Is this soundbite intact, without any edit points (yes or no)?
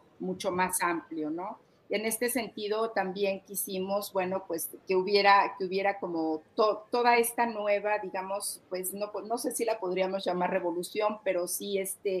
yes